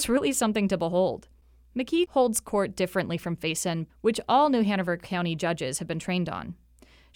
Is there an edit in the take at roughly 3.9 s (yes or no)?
yes